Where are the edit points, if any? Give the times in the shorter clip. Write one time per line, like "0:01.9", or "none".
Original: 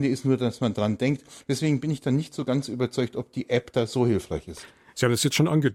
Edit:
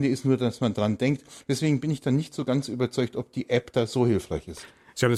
none

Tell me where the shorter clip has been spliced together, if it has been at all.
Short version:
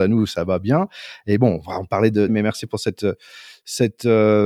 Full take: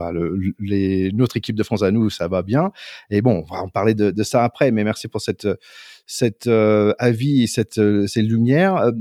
0:02.3

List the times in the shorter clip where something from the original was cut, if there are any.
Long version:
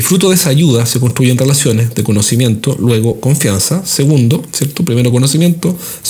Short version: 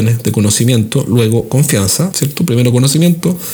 0:02.1

